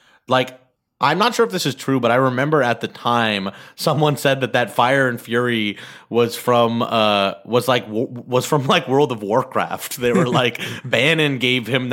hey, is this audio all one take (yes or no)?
yes